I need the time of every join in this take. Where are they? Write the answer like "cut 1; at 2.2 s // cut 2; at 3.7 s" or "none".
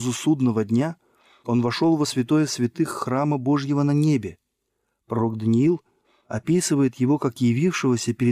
none